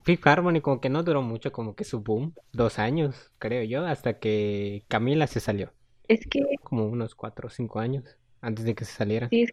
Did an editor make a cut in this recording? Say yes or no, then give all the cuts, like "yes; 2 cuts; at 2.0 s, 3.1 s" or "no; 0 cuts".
yes; 1 cut; at 6.6 s